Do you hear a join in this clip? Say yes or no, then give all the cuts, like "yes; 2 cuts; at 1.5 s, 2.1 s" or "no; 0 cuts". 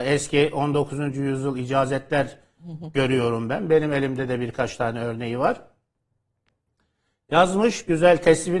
no; 0 cuts